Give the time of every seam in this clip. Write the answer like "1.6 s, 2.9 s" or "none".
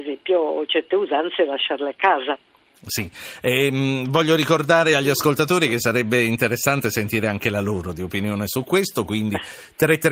none